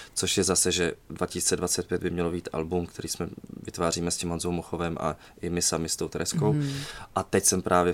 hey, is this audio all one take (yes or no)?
yes